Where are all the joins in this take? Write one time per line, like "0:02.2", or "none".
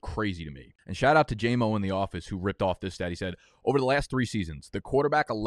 none